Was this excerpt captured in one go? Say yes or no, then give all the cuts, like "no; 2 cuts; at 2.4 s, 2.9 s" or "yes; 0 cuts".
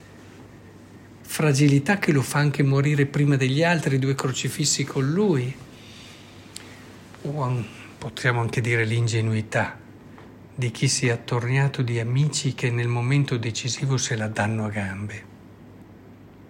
no; 1 cut; at 1.2 s